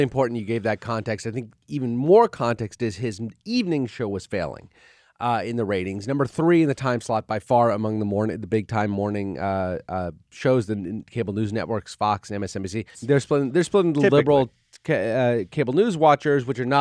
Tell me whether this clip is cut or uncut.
cut